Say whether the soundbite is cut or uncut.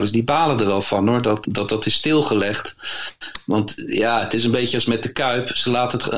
cut